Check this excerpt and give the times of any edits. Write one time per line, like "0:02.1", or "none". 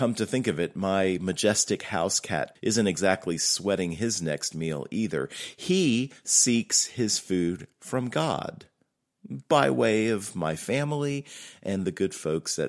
0:02.6